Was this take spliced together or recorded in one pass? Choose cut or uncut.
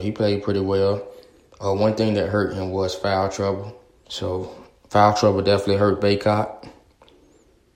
cut